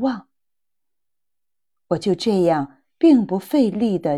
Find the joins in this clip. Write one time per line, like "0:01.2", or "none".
none